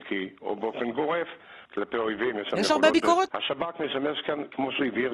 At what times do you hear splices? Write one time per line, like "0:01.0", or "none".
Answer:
0:01.6
0:03.3